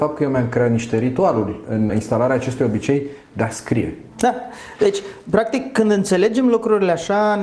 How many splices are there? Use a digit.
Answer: 1